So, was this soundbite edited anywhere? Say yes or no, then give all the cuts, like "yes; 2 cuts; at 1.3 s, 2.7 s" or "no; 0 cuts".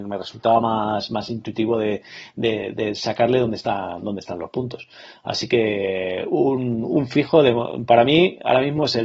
no; 0 cuts